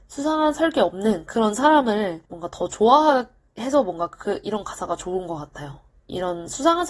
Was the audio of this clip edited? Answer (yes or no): yes